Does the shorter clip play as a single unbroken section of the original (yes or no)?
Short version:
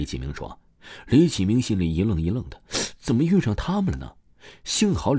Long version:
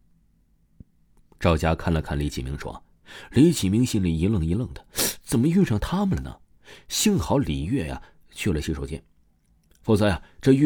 yes